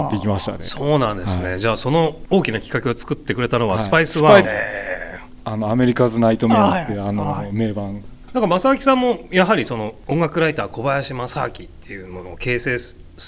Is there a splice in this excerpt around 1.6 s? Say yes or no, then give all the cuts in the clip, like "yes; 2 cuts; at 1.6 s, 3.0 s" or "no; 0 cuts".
no; 1 cut; at 4.4 s